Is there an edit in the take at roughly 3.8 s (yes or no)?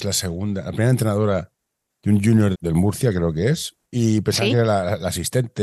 yes